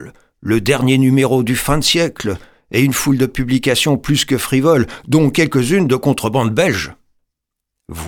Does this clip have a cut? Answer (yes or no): no